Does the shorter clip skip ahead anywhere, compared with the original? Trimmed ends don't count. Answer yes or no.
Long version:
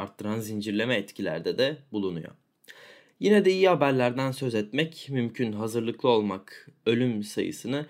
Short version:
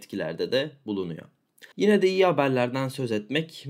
yes